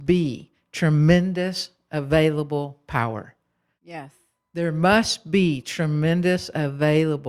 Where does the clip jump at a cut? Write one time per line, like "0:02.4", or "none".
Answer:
none